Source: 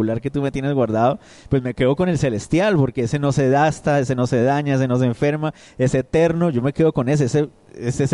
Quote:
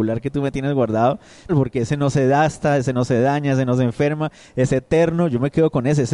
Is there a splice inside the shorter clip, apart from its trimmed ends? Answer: yes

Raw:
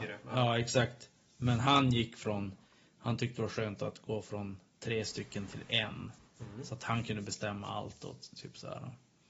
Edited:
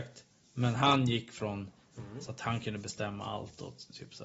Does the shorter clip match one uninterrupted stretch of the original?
no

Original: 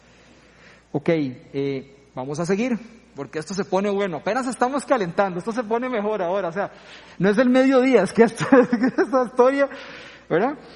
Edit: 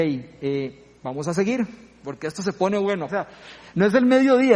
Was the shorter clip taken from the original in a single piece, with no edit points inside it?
no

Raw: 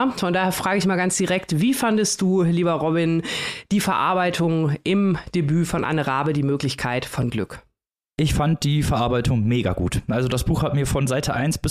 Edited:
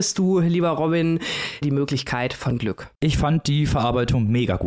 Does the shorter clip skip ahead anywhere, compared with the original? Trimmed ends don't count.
yes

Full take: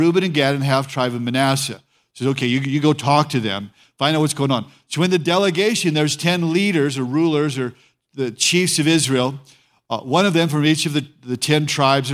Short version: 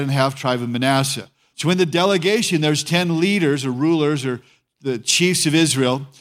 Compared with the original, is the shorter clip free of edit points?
no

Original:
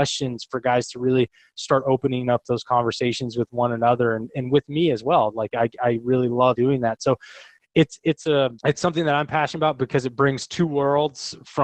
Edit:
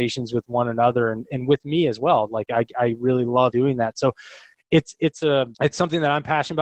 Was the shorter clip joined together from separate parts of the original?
no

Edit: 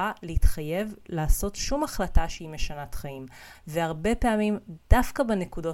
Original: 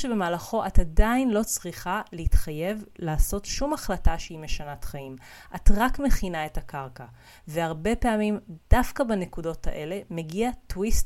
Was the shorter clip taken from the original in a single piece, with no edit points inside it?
no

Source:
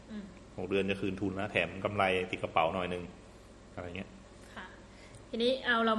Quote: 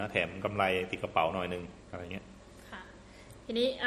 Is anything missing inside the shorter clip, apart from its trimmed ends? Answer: yes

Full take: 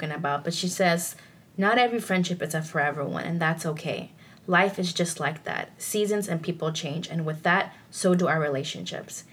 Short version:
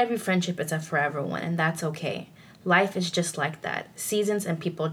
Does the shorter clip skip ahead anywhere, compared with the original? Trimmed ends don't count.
no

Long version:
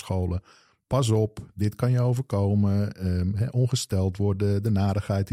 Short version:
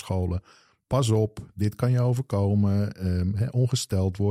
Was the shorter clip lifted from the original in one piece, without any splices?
yes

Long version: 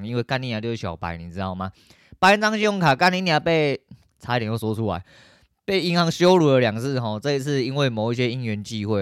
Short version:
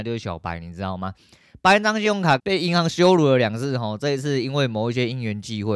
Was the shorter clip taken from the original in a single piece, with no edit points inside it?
no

